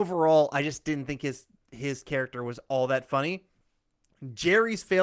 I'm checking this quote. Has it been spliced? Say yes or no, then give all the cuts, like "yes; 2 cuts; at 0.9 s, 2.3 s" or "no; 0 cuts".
no; 0 cuts